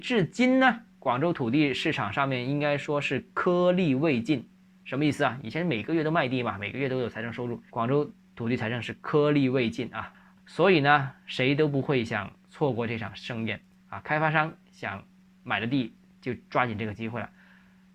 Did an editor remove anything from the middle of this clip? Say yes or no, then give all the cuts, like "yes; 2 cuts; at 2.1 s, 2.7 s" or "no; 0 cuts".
yes; 2 cuts; at 7.7 s, 10.4 s